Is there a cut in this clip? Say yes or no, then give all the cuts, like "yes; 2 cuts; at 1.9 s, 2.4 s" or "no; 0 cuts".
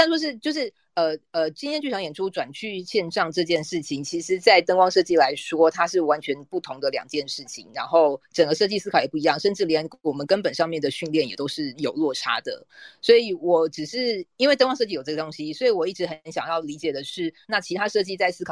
no; 0 cuts